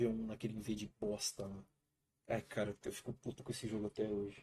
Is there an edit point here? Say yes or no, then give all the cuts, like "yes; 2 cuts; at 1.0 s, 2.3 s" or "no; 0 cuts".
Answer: no; 0 cuts